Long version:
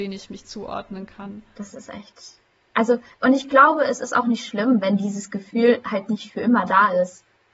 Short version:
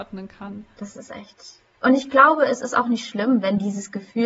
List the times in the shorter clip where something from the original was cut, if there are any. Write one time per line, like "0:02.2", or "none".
0:01.7